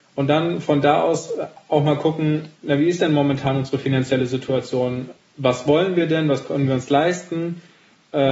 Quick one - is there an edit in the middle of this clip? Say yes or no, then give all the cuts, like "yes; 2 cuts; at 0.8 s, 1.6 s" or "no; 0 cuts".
no; 0 cuts